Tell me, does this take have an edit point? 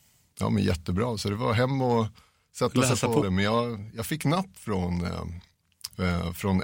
yes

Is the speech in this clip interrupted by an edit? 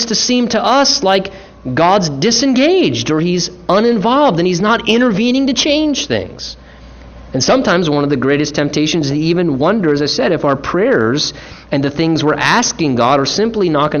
no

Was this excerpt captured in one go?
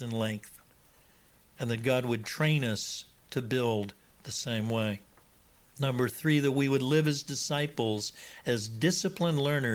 no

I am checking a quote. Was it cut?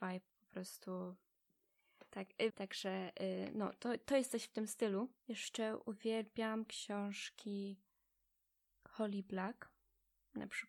yes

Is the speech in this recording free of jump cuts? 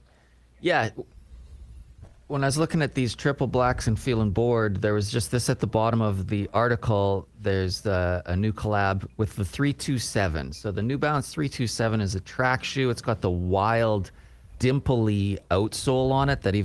no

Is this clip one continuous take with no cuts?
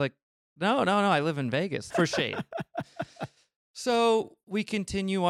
no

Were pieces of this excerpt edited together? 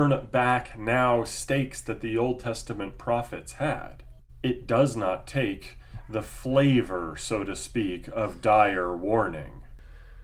no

